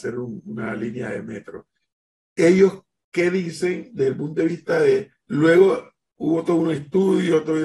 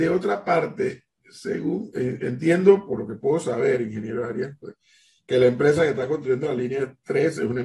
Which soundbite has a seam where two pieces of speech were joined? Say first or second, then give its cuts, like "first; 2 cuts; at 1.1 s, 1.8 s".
first; 1 cut; at 5.2 s